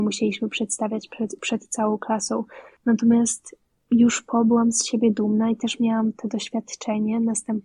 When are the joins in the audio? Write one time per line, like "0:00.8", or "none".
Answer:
0:02.8